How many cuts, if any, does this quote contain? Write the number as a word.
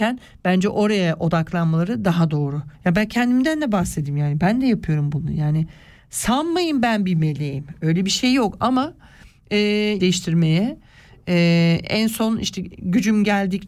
two